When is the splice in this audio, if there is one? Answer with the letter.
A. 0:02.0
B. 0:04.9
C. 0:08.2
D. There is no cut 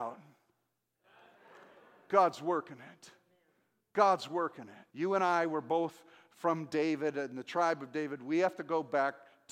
B